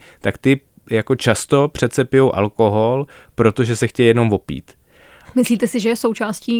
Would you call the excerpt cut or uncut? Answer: cut